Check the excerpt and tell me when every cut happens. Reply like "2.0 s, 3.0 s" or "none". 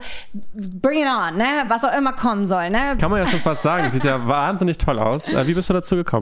3.0 s